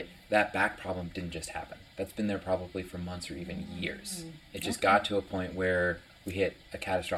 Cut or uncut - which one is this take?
uncut